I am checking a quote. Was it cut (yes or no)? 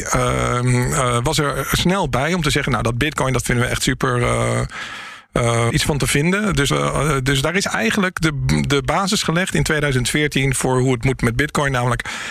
yes